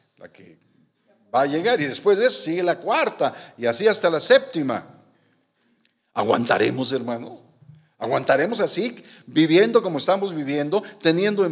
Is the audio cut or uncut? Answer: uncut